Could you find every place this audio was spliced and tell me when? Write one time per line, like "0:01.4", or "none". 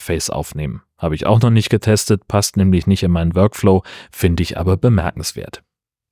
none